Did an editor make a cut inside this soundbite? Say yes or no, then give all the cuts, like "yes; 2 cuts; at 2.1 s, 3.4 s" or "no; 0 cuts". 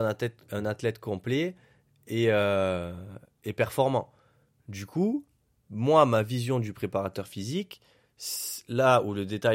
no; 0 cuts